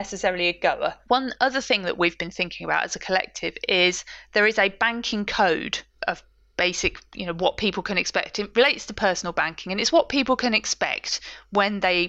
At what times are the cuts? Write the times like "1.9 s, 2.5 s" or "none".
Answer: 1.1 s